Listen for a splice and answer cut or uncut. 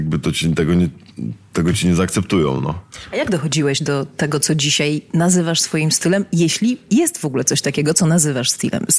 uncut